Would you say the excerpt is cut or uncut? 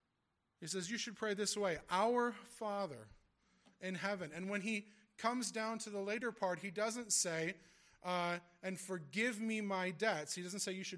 uncut